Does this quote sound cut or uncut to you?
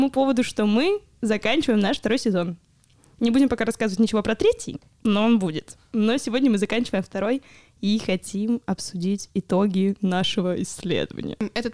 uncut